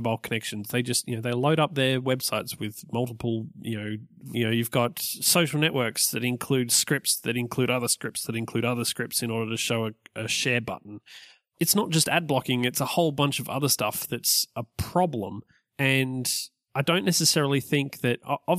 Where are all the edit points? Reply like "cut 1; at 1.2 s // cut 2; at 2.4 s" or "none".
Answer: cut 1; at 4.3 s